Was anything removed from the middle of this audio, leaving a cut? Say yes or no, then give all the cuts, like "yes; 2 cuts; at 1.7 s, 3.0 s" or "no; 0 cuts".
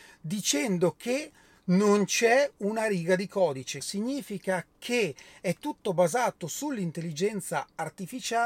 yes; 1 cut; at 3.8 s